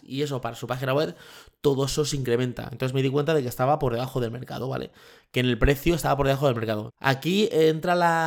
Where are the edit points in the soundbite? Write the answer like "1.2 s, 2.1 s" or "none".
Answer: 6.9 s